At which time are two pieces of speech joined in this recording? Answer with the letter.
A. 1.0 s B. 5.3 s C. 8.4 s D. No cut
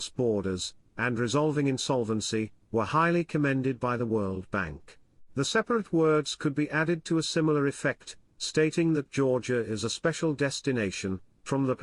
B